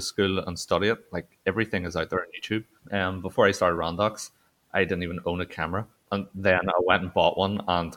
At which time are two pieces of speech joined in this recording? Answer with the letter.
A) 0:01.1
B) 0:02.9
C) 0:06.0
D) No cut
D